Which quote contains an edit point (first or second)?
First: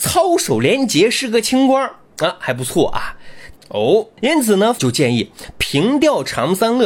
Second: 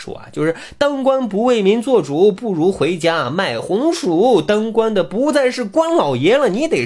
first